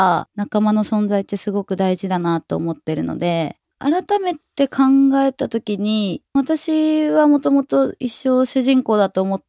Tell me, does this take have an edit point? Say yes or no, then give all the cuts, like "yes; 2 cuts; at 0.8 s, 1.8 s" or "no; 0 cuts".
yes; 1 cut; at 3.7 s